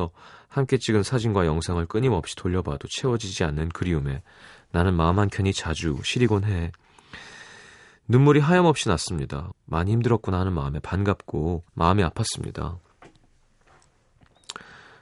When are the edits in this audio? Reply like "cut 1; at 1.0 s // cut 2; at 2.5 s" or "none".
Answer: cut 1; at 9.5 s // cut 2; at 11.7 s